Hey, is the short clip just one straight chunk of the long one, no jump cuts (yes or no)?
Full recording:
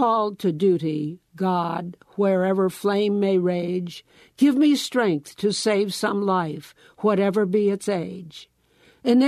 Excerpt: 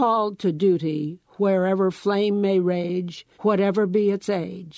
no